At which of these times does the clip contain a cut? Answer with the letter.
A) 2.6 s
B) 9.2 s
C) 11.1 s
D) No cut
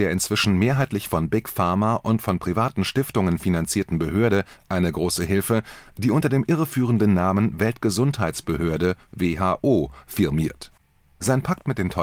D